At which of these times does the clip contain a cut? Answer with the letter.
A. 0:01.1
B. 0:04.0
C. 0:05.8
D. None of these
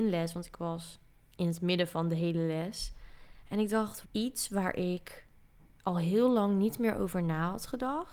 B